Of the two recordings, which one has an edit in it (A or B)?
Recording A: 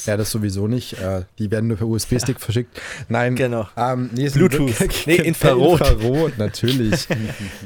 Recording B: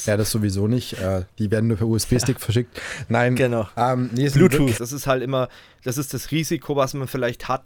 B